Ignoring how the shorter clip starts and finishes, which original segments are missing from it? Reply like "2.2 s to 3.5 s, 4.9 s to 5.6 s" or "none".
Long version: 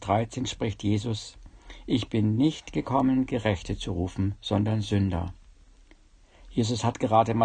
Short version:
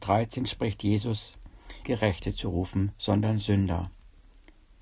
1.8 s to 3.3 s